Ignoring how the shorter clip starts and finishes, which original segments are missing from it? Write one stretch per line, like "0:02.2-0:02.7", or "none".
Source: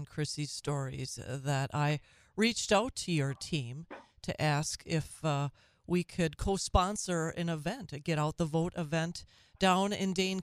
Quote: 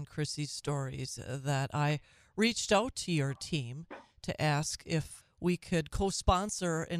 0:05.2-0:05.7